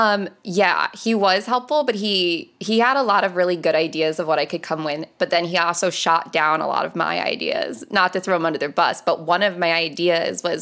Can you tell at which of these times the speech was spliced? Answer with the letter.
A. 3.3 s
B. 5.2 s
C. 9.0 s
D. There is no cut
B